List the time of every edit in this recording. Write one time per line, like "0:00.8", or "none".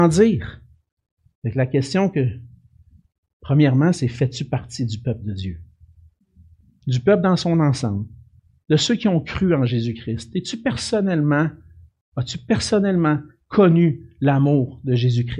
none